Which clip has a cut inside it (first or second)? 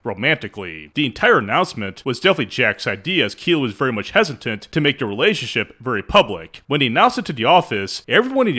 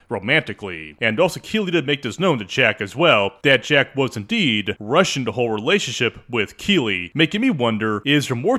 second